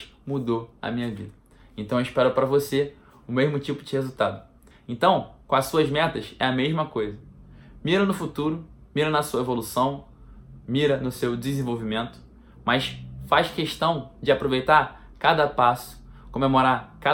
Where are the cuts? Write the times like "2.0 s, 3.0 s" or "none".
4.7 s